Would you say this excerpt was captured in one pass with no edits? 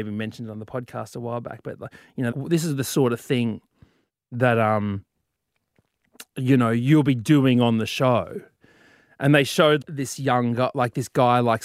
no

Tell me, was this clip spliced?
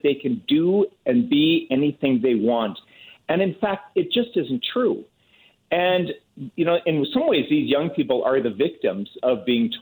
no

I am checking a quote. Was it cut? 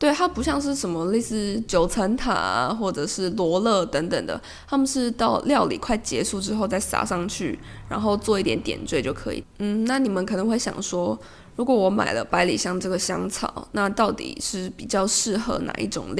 yes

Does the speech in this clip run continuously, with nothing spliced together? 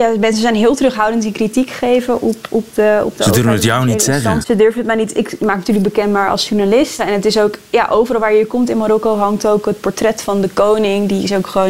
no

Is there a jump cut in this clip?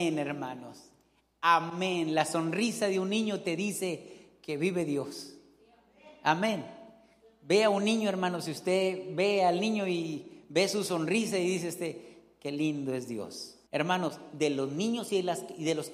yes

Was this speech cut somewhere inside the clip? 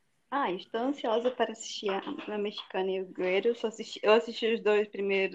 no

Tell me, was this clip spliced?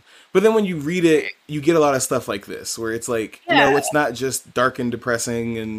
no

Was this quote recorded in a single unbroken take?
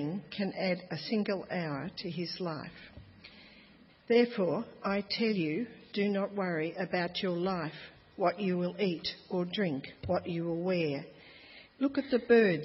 no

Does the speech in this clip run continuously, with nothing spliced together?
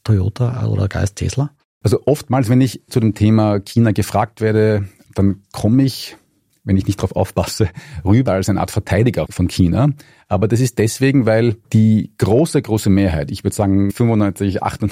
no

